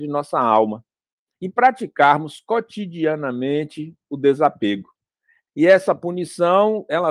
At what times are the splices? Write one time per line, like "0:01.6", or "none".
0:05.5

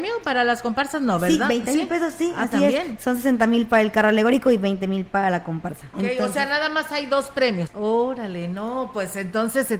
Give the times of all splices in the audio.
0:05.9
0:07.7

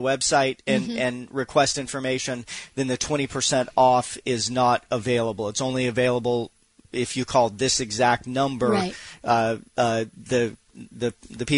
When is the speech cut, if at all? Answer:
none

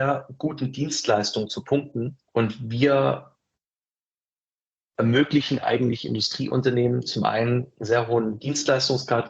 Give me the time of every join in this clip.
0:02.3

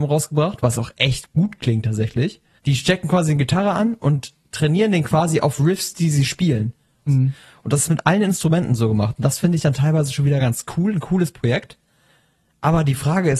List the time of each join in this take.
0:02.6
0:07.1

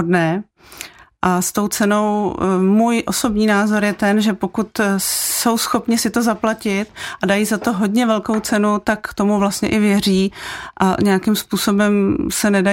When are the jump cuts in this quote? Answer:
none

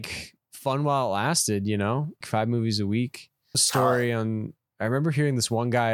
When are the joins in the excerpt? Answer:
0:02.2
0:03.5

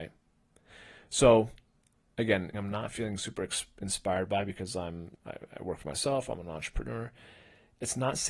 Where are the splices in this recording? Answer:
0:02.5
0:05.2

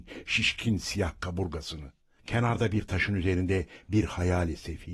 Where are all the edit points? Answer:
0:02.2

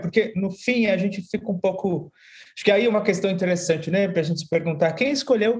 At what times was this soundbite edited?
none

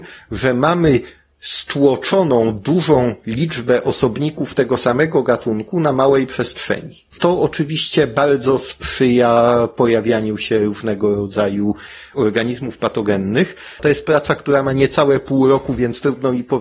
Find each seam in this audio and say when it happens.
0:13.8

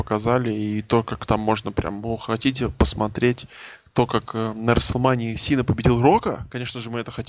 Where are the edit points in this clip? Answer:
none

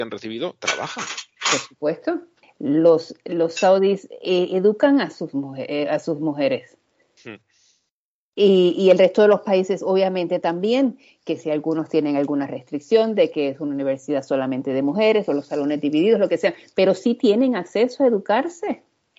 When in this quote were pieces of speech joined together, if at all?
0:02.4

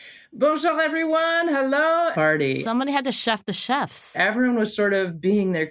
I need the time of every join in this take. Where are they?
0:02.1
0:04.1

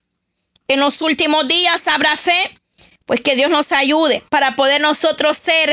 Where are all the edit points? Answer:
0:04.3

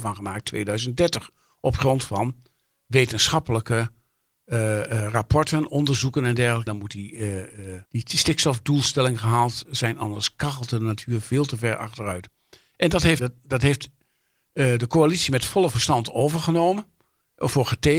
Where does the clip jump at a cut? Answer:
0:06.7
0:07.9
0:13.2

